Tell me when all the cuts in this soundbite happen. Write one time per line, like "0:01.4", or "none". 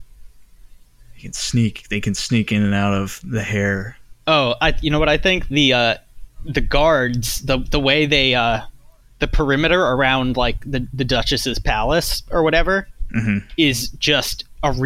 none